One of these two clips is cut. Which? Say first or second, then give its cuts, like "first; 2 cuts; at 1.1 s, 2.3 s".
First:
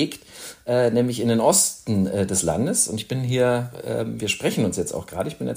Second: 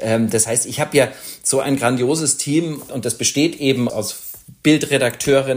second; 2 cuts; at 2.9 s, 3.9 s